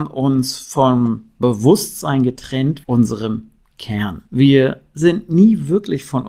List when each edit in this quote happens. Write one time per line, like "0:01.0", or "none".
0:02.8
0:04.3